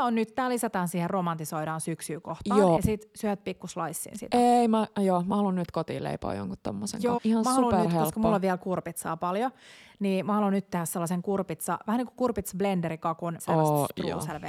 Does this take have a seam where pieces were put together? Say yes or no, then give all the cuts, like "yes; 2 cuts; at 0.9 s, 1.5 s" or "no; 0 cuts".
yes; 3 cuts; at 2.8 s, 7.2 s, 13.4 s